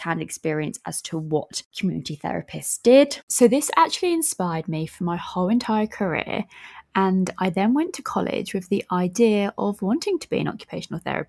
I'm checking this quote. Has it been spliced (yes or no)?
no